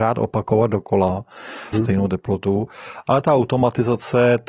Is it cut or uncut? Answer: cut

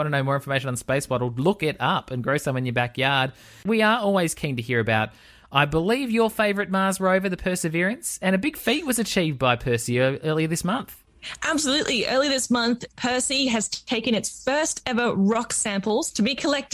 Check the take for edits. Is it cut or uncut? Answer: uncut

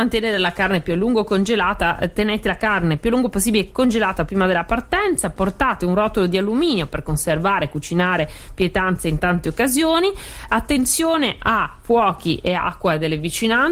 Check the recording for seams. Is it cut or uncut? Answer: uncut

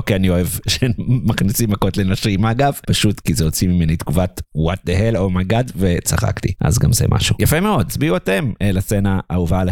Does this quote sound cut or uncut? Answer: uncut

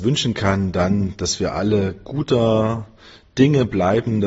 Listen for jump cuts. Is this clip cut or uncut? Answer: uncut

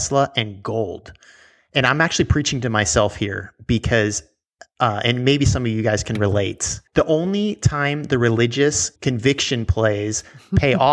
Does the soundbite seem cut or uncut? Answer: cut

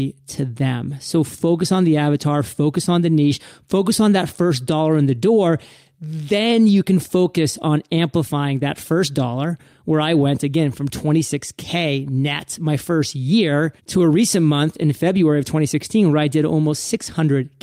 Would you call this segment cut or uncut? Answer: cut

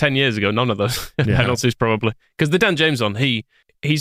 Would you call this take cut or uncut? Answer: uncut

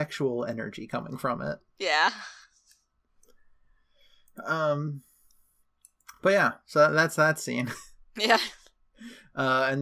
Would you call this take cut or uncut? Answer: uncut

